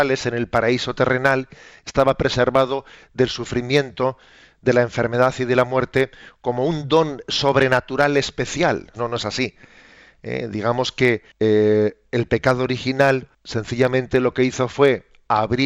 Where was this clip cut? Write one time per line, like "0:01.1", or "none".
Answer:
0:08.9
0:11.3
0:13.3

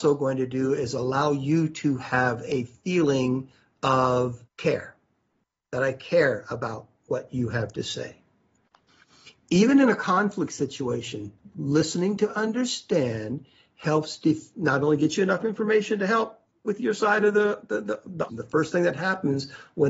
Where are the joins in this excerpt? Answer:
0:04.5
0:18.3

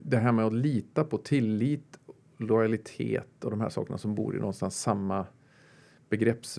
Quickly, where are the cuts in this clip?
none

